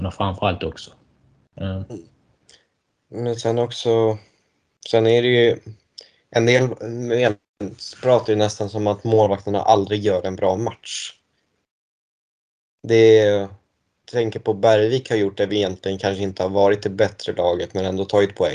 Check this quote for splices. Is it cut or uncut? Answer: cut